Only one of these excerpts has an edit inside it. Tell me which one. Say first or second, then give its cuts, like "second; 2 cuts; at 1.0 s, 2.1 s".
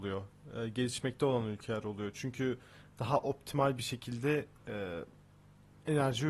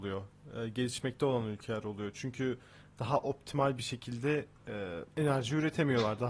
second; 1 cut; at 5.1 s